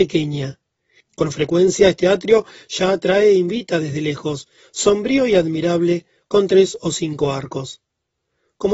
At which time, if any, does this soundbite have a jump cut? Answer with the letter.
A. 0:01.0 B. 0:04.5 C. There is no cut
A